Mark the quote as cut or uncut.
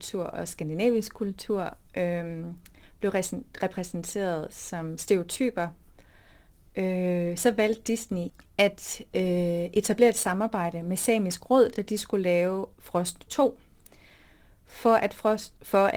uncut